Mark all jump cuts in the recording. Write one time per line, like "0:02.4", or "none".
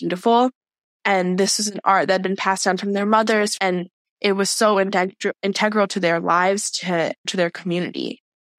0:03.6
0:07.2